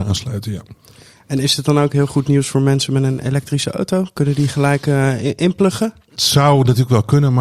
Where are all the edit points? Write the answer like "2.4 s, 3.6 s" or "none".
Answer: none